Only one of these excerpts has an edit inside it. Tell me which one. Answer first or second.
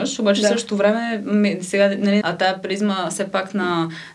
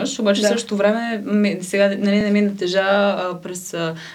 first